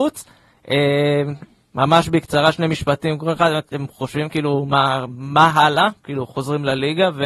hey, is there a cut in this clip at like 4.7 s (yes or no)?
no